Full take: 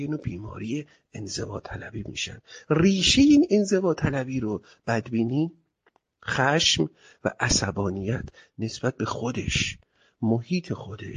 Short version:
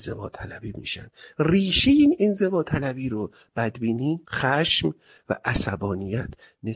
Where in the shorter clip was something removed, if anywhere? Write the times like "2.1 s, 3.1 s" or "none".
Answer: 4.2 s

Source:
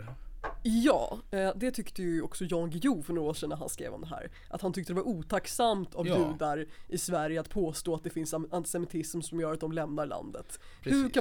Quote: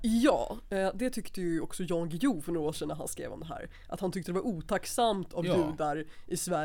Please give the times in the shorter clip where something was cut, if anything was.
none

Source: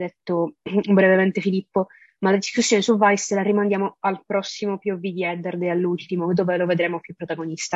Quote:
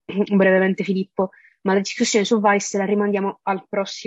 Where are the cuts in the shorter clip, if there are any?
none

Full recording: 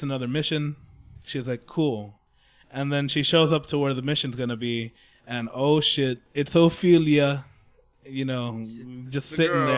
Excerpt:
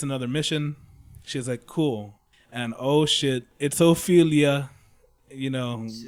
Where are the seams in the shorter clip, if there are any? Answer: 2.3 s

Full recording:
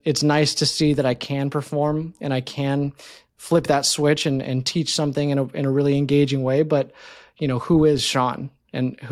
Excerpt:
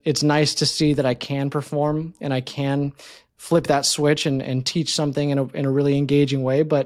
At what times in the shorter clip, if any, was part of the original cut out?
none

